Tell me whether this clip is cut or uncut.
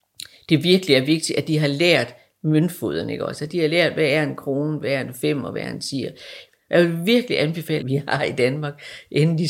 cut